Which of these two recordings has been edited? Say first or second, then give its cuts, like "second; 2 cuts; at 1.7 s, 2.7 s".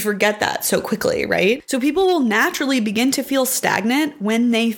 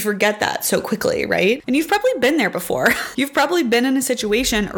second; 1 cut; at 1.6 s